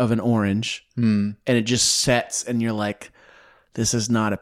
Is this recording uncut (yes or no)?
yes